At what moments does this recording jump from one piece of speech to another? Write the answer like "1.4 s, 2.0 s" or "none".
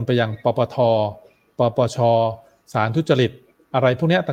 none